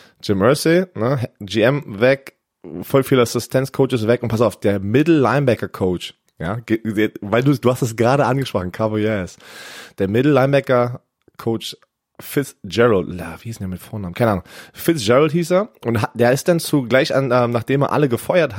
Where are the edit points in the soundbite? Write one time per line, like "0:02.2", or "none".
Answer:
none